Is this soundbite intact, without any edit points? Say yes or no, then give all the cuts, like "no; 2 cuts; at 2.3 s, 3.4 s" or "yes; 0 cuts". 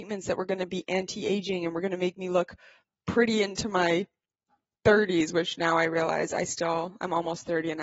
yes; 0 cuts